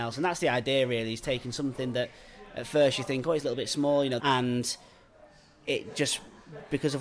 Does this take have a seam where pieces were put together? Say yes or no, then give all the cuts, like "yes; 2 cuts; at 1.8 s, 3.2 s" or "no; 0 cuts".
yes; 1 cut; at 4.2 s